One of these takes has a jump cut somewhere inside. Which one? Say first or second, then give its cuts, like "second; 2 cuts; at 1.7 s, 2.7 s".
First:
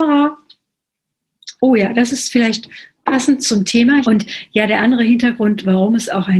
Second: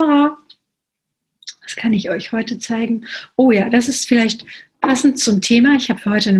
first; 2 cuts; at 1.6 s, 4.0 s